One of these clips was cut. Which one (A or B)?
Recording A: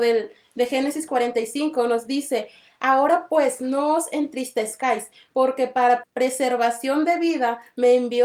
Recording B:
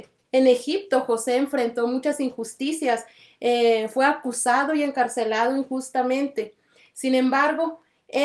A